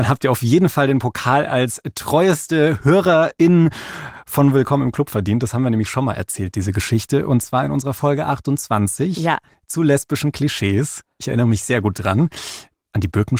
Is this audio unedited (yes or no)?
yes